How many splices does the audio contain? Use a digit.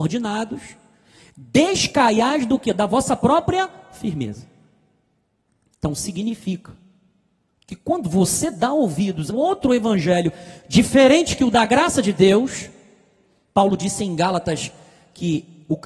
1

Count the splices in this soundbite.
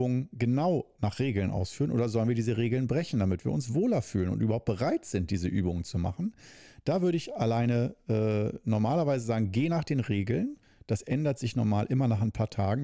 0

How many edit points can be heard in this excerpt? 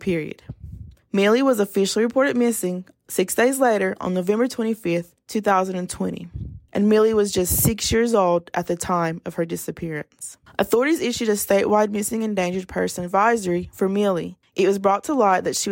1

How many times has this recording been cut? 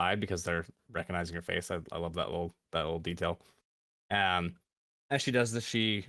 1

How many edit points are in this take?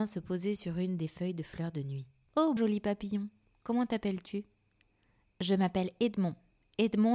1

